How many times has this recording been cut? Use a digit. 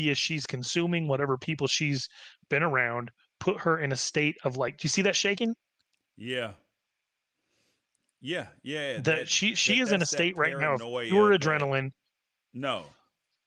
1